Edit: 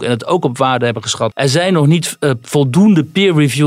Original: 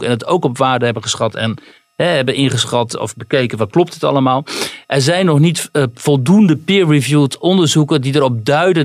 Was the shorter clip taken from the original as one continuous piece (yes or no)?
no